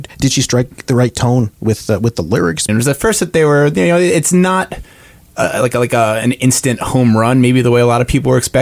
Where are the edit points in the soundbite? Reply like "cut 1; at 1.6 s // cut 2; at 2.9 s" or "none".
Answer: cut 1; at 2.7 s

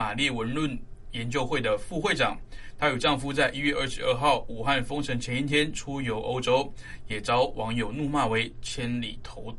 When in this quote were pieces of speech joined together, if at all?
none

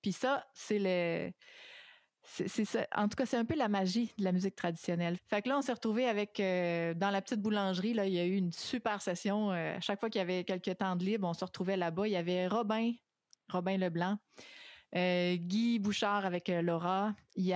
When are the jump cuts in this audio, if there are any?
cut 1; at 5.2 s

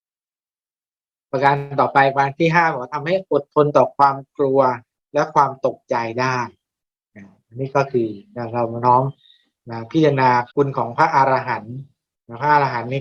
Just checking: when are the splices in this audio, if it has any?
cut 1; at 10.5 s

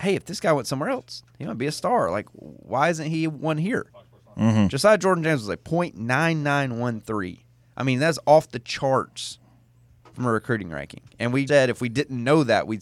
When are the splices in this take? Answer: cut 1; at 11.5 s

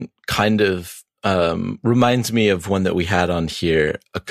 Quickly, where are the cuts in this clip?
none

